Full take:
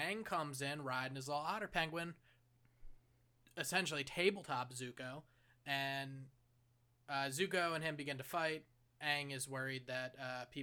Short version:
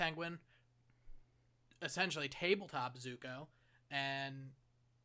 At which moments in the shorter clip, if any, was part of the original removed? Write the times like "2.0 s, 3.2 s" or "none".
none